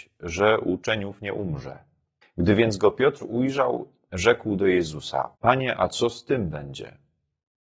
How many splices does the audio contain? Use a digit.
2